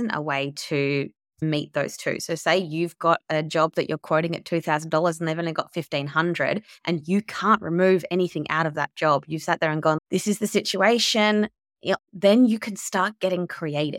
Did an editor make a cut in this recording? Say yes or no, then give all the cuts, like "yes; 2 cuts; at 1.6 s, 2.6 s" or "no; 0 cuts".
yes; 2 cuts; at 10.0 s, 12.0 s